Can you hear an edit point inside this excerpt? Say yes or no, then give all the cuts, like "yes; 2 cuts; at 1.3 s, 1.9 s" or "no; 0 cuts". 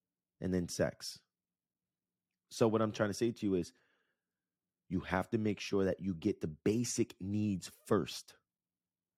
no; 0 cuts